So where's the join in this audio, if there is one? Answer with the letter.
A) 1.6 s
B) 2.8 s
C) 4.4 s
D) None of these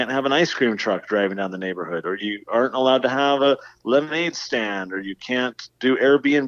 D